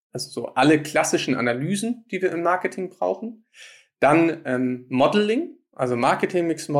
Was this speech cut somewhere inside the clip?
no; 0 cuts

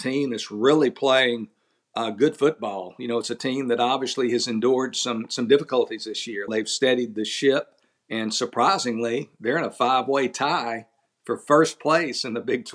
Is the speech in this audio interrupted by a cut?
yes; 1 cut; at 6.5 s

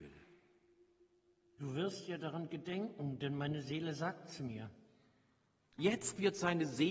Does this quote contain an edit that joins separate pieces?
no; 0 cuts

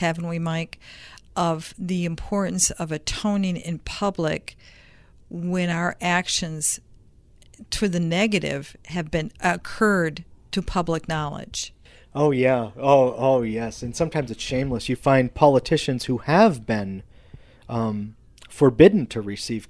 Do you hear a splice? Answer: no; 0 cuts

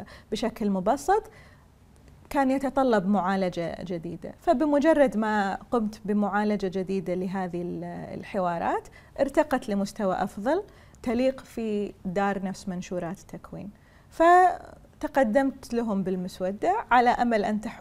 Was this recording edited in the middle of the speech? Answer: no; 0 cuts

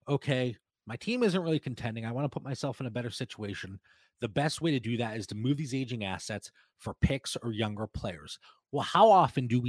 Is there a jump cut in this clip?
no; 0 cuts

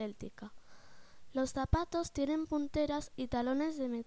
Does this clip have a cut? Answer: no; 0 cuts

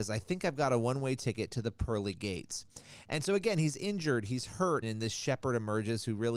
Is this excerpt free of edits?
no; 1 cut; at 4.8 s

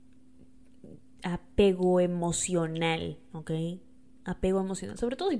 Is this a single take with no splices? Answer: yes; 0 cuts

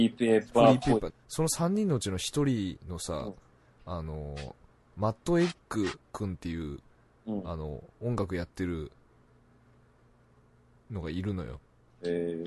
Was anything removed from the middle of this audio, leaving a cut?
yes; 1 cut; at 1.1 s

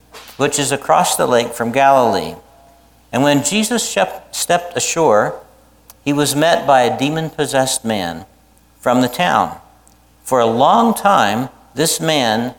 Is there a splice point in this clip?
no; 0 cuts

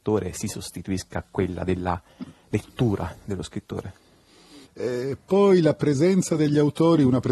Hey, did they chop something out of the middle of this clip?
yes; 1 cut; at 4.6 s

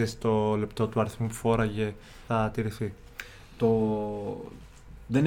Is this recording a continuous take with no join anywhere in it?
no; 1 cut; at 2.3 s

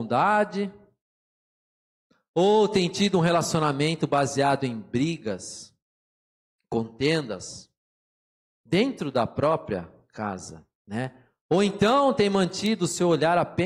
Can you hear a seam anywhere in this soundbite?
no; 0 cuts

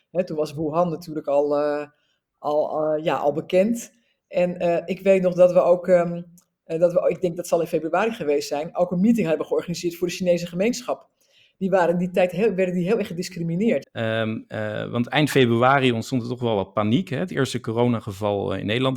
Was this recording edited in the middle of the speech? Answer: yes; 1 cut; at 13.8 s

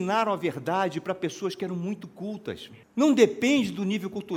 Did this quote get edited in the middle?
yes; 1 cut; at 2.8 s

